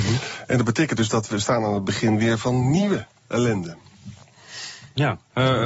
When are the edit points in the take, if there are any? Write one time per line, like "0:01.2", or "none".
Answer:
none